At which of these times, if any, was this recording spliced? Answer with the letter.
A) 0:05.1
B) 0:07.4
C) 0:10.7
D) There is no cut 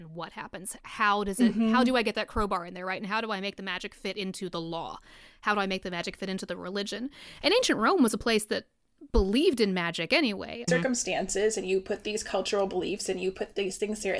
C